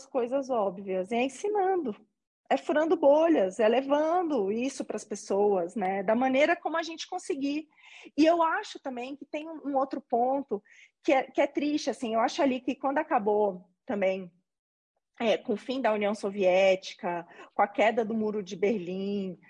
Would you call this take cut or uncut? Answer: uncut